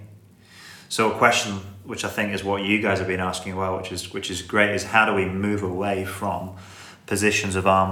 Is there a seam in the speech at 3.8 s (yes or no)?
no